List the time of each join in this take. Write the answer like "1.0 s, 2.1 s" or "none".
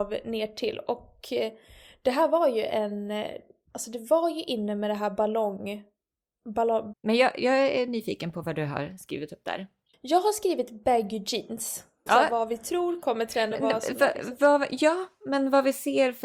6.9 s, 12.1 s, 13.5 s